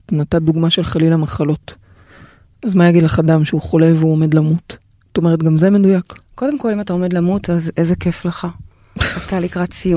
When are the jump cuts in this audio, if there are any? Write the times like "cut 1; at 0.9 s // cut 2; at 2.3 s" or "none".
none